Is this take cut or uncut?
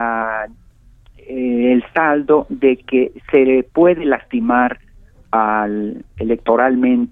uncut